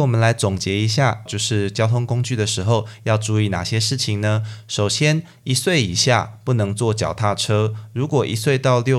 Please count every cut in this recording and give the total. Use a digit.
1